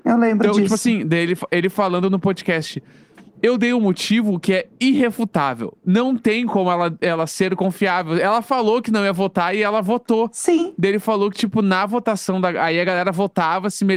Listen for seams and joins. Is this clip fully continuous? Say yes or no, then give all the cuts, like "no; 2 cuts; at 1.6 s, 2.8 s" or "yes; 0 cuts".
yes; 0 cuts